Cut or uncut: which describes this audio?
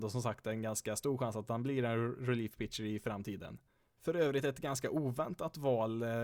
uncut